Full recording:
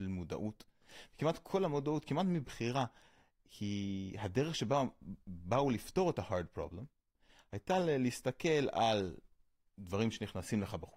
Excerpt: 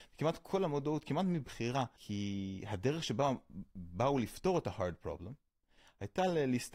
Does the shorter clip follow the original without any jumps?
no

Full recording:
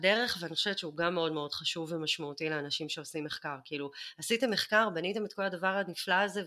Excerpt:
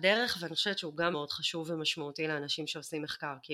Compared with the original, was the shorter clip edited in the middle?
yes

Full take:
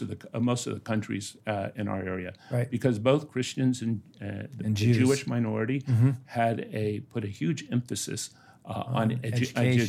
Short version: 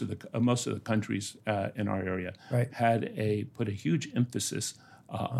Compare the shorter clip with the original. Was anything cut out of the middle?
yes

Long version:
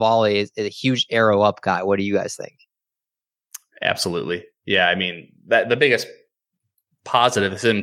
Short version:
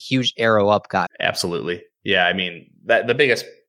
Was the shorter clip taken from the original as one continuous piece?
no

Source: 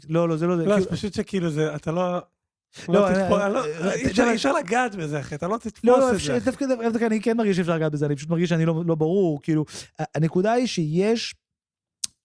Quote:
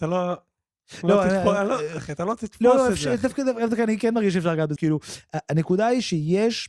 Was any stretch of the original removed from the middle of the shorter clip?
yes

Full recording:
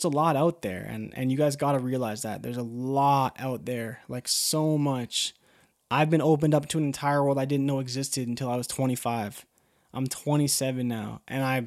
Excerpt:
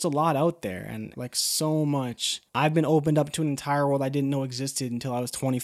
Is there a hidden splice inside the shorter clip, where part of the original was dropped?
yes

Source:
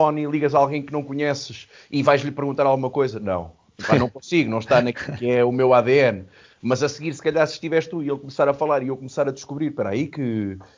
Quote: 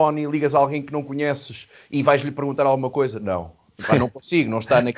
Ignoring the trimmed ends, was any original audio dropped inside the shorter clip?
no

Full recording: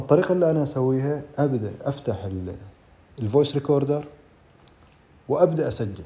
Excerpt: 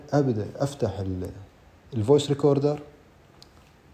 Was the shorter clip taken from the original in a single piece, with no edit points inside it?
yes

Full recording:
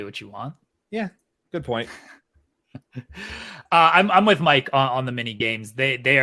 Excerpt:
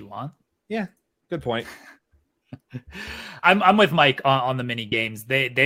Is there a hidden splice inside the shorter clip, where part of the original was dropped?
yes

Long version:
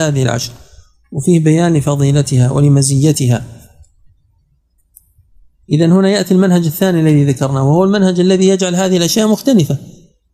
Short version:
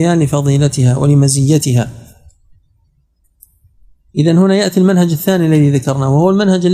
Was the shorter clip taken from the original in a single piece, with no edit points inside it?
yes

